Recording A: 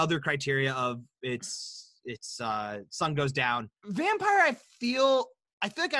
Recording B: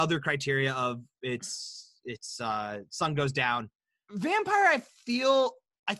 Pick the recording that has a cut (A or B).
A